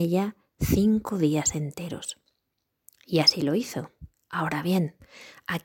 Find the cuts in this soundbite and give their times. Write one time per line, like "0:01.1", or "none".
none